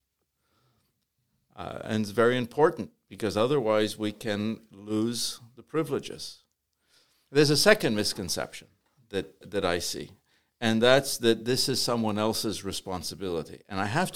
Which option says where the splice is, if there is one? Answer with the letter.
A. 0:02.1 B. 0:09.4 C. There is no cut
B